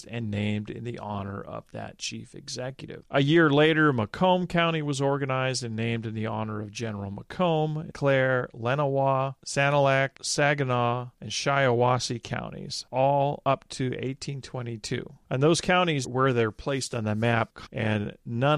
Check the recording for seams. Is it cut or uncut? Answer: cut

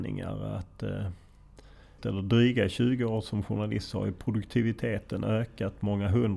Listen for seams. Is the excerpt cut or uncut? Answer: cut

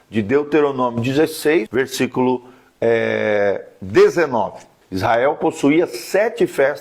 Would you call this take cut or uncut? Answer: cut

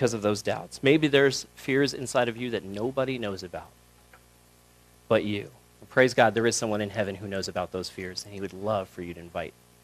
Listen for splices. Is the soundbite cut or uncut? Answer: uncut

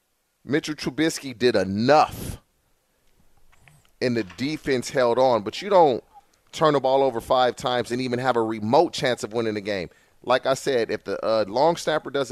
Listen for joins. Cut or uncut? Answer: uncut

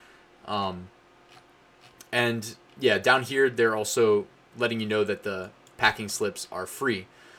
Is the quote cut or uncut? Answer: uncut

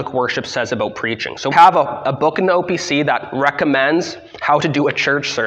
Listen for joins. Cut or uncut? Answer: cut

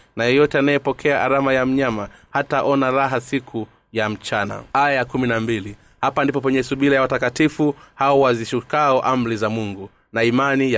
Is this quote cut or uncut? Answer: cut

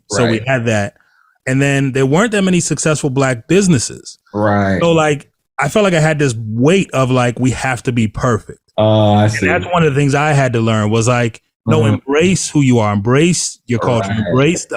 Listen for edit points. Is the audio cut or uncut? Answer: uncut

